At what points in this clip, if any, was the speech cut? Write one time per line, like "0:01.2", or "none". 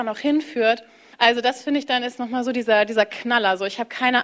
0:01.1

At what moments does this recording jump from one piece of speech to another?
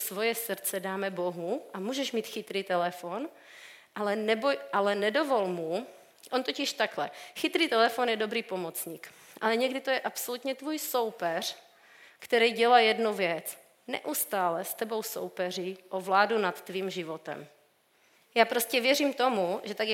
0:18.2

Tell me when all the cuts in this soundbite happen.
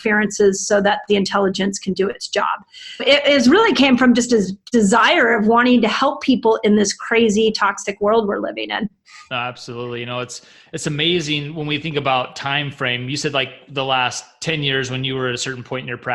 0:03.0

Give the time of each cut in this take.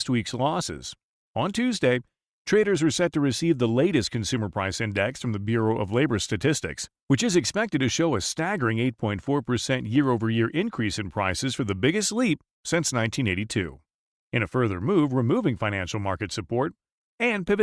0:01.2
0:14.1

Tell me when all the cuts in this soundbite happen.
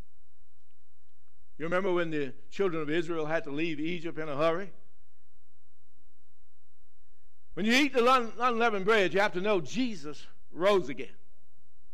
0:07.5

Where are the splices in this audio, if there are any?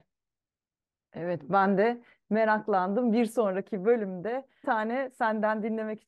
0:04.6

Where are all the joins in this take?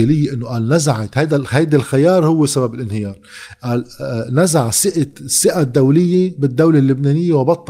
none

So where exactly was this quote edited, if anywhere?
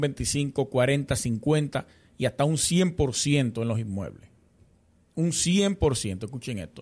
none

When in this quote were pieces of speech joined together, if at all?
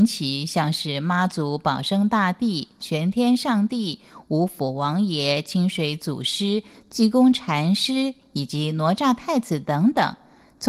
none

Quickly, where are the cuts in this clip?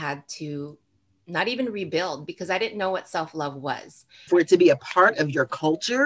0:04.3

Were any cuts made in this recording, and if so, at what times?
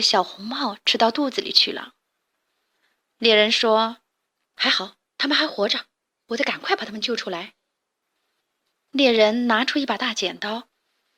none

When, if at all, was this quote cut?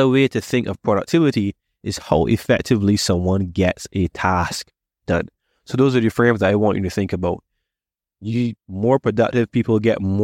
0:08.6

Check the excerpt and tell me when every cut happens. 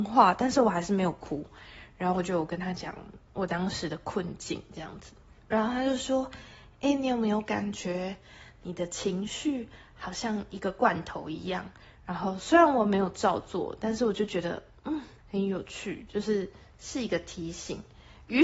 0:11.9
0:15.2

